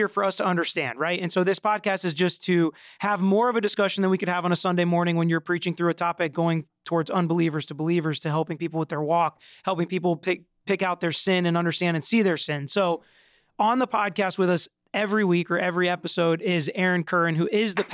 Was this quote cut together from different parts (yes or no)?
no